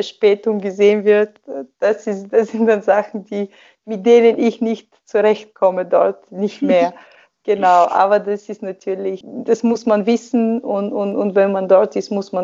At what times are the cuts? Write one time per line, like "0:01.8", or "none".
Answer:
none